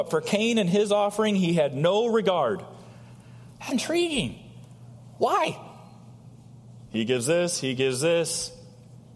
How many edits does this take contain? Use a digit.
2